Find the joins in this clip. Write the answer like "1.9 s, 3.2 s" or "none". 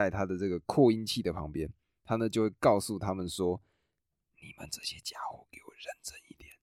none